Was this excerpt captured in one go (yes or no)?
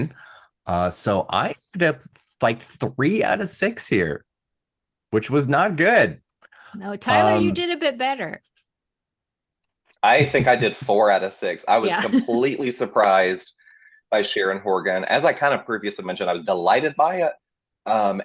yes